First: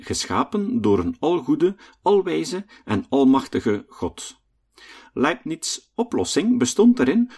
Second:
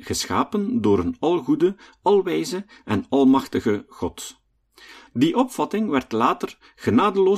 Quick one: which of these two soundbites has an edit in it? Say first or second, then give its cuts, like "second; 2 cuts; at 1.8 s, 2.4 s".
second; 1 cut; at 5.1 s